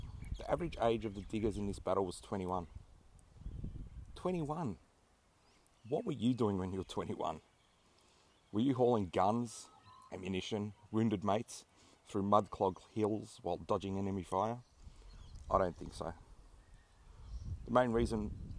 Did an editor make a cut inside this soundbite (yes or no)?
no